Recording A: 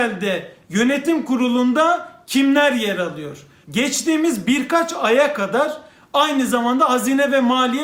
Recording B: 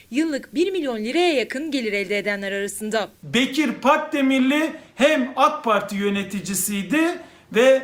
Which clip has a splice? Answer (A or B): A